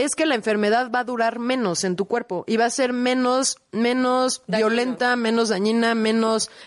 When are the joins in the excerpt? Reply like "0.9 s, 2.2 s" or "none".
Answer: none